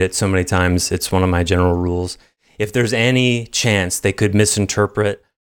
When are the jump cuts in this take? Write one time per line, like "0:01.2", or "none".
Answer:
none